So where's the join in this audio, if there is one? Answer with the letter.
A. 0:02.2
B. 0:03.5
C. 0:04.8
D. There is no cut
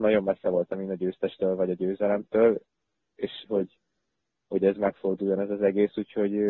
B